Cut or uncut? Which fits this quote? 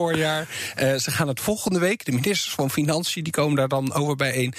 uncut